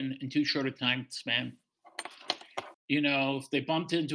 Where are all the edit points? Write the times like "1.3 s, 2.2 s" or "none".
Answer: 2.7 s

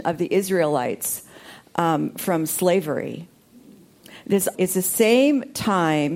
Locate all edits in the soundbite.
4.5 s

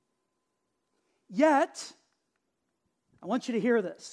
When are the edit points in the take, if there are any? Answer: none

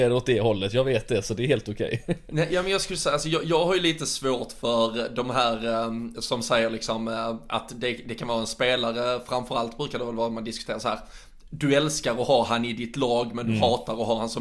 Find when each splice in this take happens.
none

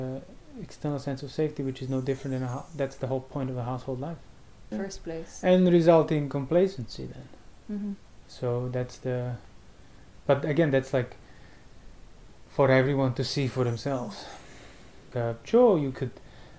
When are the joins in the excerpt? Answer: 4.7 s, 8.2 s, 15.1 s

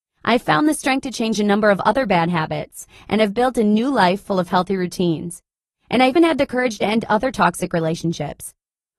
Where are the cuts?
6.2 s

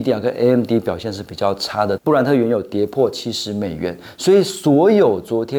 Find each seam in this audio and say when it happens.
2.0 s

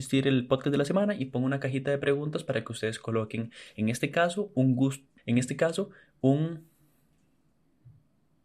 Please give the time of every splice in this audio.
5.2 s

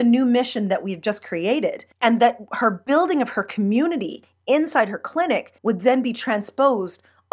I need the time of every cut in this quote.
1.9 s, 5.6 s

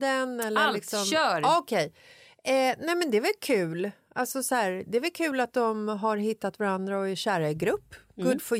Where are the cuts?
none

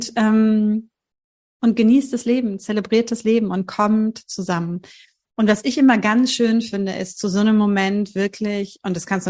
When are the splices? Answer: none

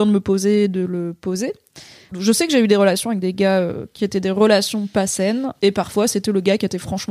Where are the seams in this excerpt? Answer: 2.1 s, 5.6 s

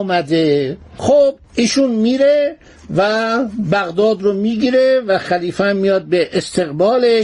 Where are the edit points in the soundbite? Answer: 1.4 s

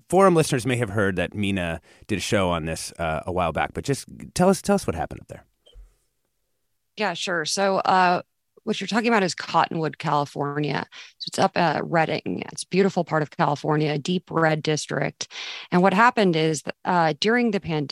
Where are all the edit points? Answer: 12.5 s

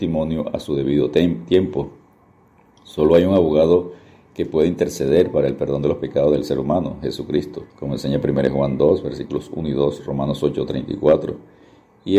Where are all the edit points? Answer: 7.7 s

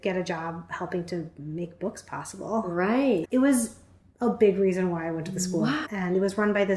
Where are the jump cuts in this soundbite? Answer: 3.2 s, 5.8 s

